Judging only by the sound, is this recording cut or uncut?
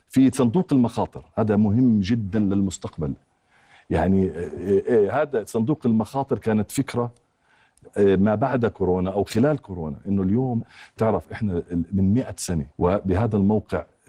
cut